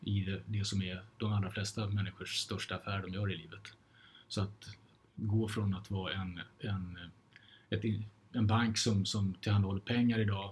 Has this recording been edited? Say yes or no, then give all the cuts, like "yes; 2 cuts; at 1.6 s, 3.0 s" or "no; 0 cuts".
no; 0 cuts